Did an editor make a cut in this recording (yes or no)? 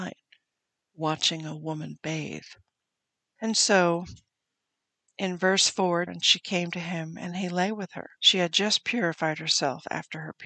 yes